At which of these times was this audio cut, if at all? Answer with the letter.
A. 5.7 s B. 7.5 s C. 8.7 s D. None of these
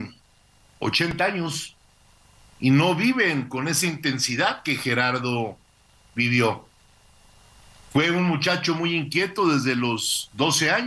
D